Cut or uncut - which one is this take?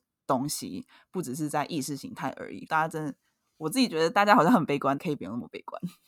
cut